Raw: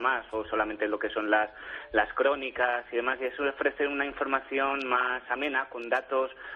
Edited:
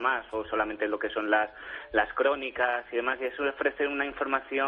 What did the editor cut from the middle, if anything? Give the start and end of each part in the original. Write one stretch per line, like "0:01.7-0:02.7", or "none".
none